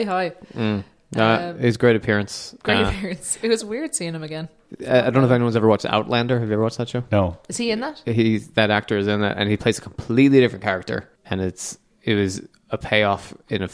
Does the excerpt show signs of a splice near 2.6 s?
no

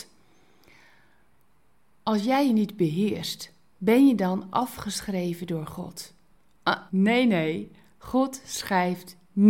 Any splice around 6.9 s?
yes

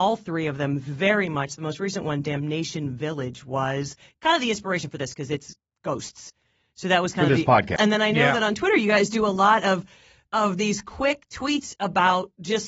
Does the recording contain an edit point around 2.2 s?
no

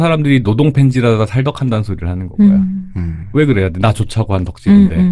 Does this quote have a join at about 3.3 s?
no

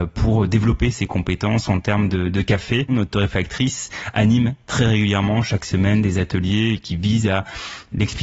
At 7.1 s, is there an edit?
no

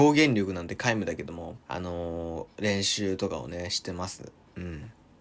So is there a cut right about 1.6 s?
yes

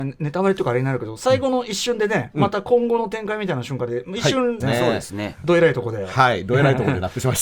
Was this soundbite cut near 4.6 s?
yes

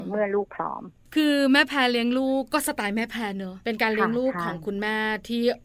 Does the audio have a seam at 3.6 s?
yes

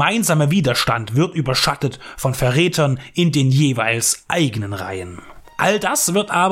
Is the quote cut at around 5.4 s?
yes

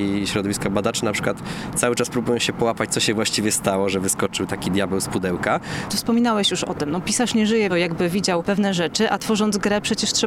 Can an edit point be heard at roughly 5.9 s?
yes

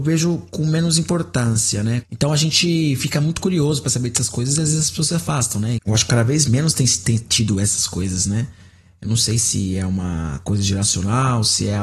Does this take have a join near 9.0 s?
no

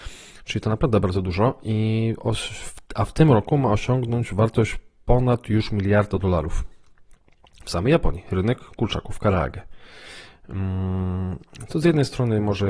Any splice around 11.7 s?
no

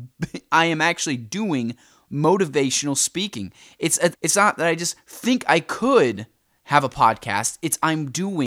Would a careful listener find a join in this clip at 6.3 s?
no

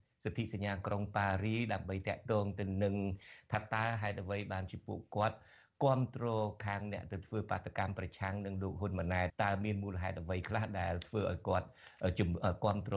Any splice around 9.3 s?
yes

